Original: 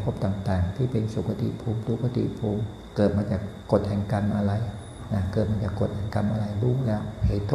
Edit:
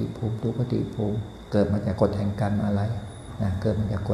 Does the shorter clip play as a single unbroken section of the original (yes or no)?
no